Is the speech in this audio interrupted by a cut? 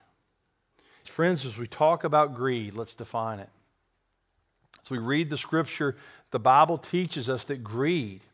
yes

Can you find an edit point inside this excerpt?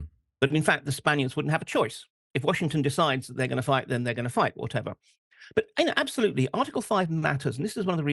no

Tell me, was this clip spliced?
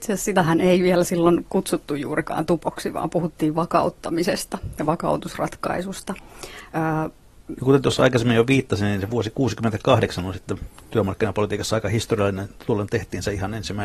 yes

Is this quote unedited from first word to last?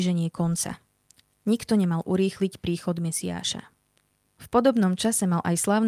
no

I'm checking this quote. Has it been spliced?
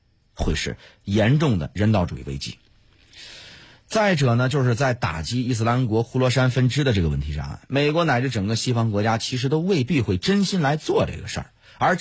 no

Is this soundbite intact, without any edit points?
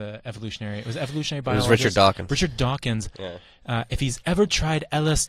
yes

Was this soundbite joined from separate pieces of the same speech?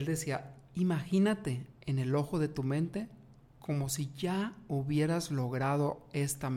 yes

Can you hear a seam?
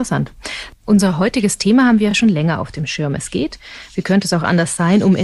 no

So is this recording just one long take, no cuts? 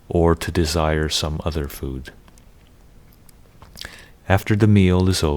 no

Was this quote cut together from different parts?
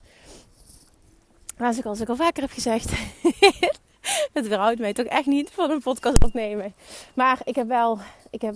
no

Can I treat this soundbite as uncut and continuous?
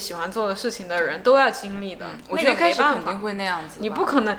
yes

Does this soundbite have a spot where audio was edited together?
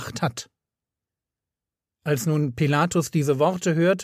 no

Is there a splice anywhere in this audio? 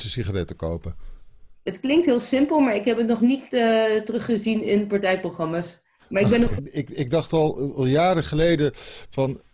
yes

